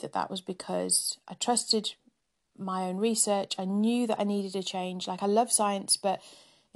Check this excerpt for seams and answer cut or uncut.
uncut